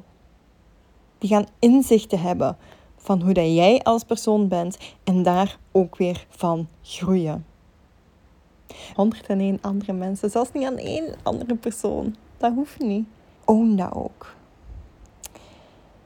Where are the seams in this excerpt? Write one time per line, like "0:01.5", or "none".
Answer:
0:08.9
0:13.3